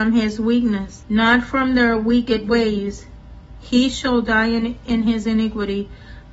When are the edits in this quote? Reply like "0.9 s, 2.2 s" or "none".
1.0 s